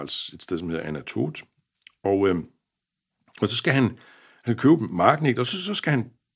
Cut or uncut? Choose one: uncut